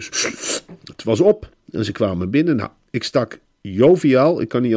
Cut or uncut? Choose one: uncut